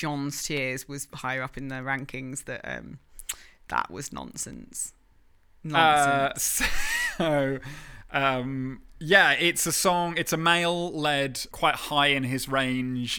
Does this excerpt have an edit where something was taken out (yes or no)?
yes